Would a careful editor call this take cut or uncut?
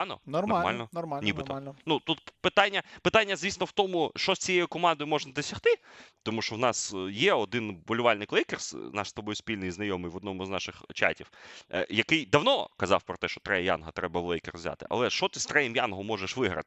uncut